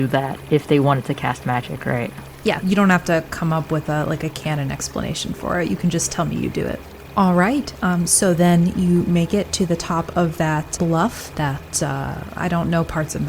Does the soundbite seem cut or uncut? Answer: cut